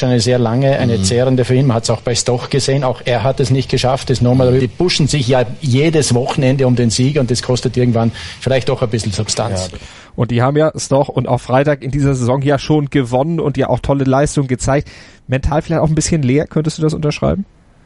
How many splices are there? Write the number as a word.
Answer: one